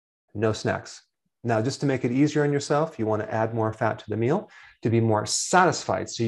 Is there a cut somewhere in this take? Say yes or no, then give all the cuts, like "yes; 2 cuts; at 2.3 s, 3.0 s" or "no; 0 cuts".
no; 0 cuts